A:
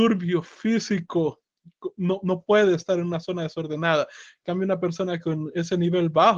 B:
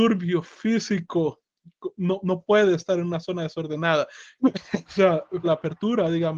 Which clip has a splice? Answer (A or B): B